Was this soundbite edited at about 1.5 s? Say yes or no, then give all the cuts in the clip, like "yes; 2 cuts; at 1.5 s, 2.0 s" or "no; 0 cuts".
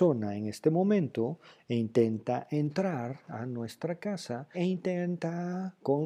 no; 1 cut; at 4.5 s